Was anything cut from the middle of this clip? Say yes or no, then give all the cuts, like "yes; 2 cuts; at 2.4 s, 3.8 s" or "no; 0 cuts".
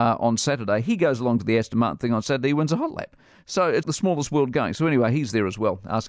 yes; 1 cut; at 3.8 s